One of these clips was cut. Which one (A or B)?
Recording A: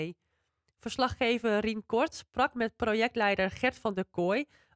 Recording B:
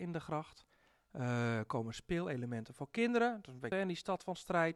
B